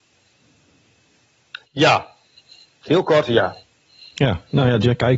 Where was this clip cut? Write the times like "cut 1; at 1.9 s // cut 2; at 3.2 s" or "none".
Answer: none